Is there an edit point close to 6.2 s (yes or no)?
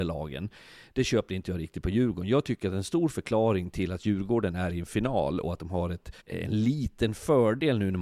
yes